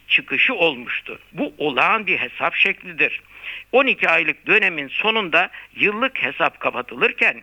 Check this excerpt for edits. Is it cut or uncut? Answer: cut